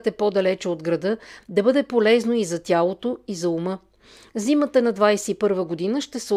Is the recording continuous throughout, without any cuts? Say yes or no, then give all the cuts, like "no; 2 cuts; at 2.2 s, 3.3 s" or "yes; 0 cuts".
no; 1 cut; at 1.4 s